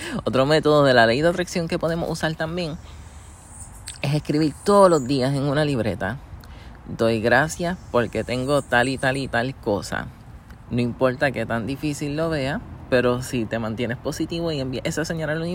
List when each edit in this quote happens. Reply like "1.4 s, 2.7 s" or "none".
10.7 s